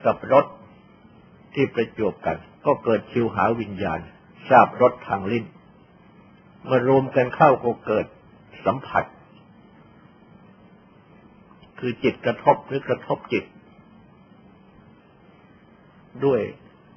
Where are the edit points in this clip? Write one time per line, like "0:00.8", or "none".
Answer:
0:02.5